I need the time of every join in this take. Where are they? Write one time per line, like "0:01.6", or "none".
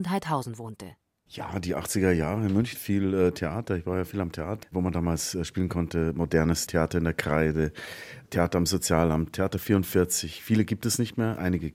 0:02.7
0:04.6
0:06.7